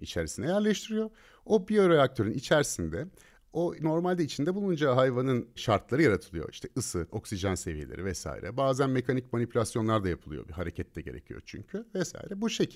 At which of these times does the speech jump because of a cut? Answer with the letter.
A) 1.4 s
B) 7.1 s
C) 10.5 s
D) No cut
B